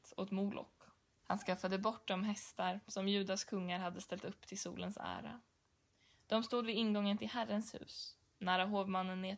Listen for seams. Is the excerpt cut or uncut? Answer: uncut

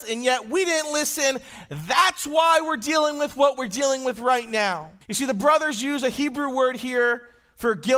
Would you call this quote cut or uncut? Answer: cut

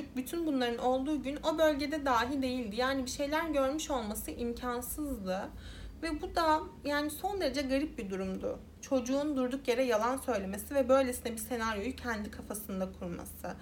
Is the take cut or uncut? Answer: uncut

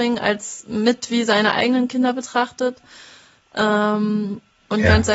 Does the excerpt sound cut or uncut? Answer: uncut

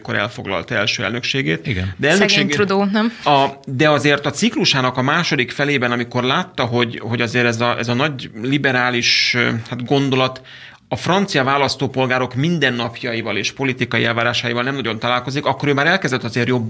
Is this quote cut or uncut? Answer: cut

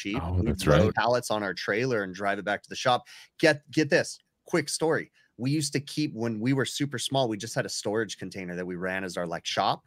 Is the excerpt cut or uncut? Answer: cut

